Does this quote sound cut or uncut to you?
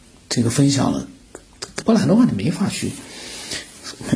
cut